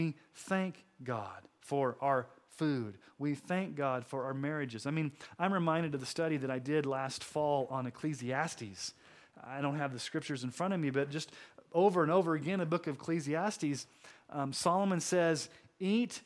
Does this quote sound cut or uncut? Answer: uncut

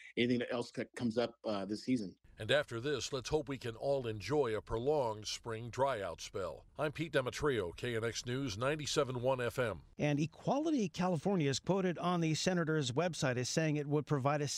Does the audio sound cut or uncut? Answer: cut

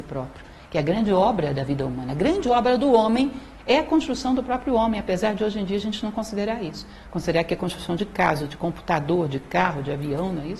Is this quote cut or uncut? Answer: uncut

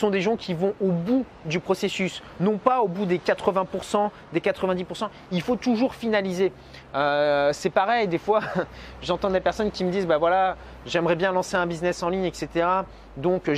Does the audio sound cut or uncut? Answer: uncut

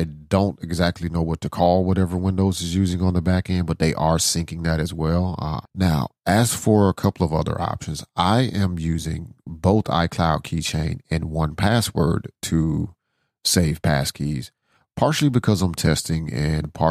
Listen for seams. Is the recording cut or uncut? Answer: cut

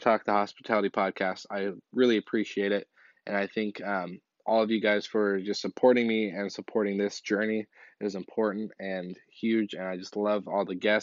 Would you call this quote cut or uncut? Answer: uncut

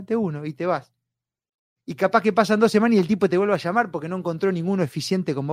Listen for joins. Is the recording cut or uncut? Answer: uncut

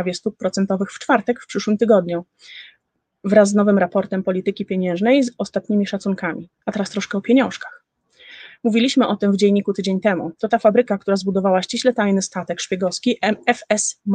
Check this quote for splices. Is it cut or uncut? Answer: cut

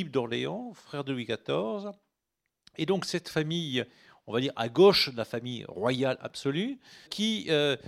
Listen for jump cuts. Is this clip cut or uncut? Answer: uncut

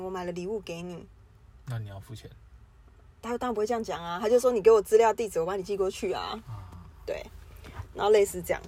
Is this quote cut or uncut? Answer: uncut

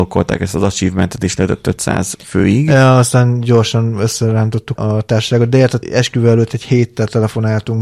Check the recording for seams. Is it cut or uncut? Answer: cut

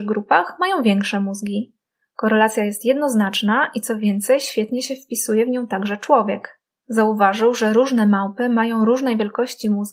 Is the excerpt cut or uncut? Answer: cut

